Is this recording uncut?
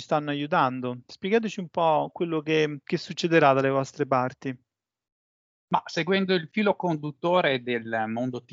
yes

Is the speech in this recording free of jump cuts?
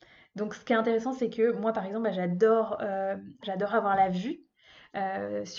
no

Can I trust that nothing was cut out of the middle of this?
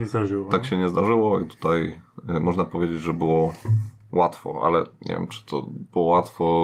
yes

